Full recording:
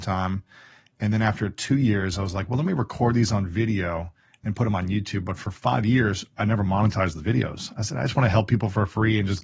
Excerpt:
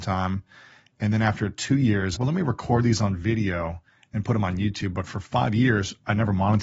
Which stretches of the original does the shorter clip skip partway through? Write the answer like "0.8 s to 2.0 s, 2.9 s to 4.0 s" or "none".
2.2 s to 2.5 s